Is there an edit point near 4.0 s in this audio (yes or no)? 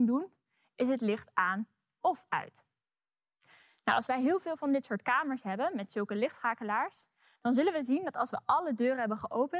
no